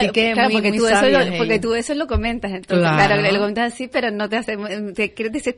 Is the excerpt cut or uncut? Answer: uncut